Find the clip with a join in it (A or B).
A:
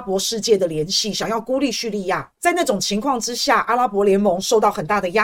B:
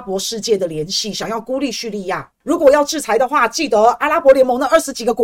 B